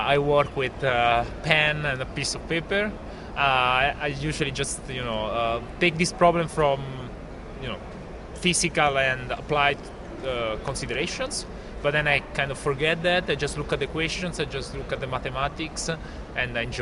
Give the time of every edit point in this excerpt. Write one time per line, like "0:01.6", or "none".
none